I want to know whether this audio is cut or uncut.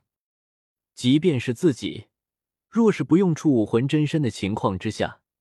uncut